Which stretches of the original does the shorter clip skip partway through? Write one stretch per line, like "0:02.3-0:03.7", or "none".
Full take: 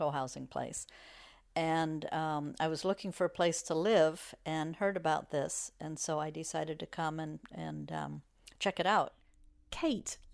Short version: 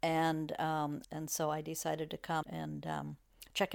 0:02.6-0:05.7
0:07.1-0:07.5

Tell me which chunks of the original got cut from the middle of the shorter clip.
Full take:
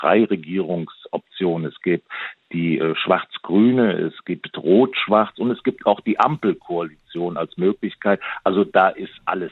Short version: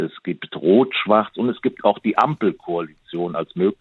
none

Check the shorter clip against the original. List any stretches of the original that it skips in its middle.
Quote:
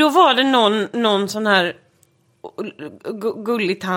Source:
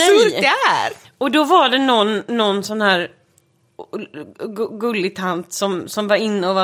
none

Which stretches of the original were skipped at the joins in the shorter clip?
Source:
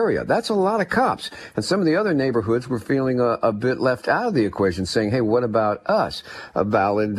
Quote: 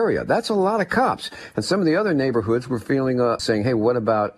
0:03.4-0:04.9

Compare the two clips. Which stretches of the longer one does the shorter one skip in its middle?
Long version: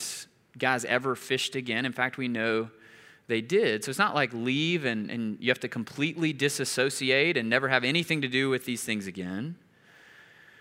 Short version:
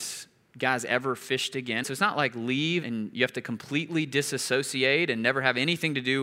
0:01.8-0:03.8
0:04.8-0:05.1

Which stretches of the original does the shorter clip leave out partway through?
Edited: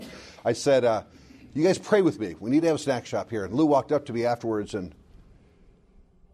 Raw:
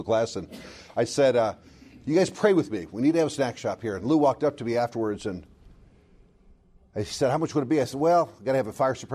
none

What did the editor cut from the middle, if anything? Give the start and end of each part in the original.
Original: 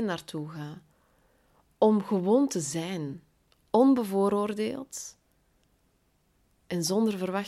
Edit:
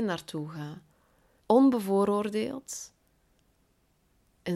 0:01.4-0:03.6

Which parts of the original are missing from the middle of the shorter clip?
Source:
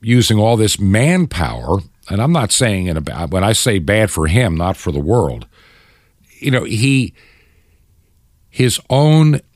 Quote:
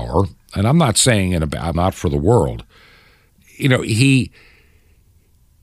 0:03.3-0:04.6

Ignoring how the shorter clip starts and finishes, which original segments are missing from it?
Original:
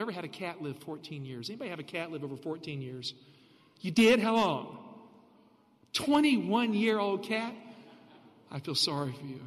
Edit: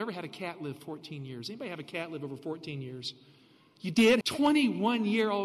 0:04.2-0:05.9

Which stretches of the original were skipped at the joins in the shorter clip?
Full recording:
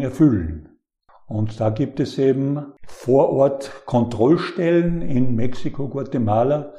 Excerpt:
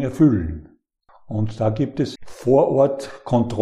0:02.1-0:02.8

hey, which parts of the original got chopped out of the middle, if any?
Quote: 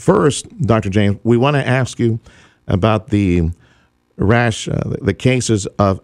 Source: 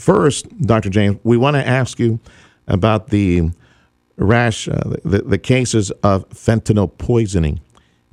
0:05.0-0:05.2

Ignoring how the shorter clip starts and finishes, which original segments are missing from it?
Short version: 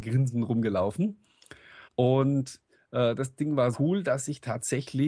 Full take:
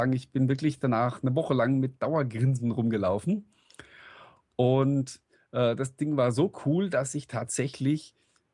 0:04.1-0:04.5
0:06.3-0:06.6

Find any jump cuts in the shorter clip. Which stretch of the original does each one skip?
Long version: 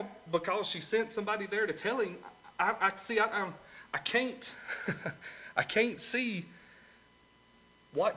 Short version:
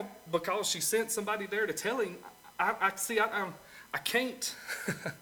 none

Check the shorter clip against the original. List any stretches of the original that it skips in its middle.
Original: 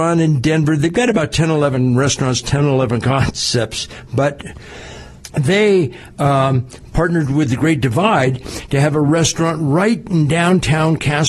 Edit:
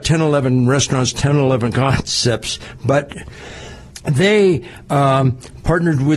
none

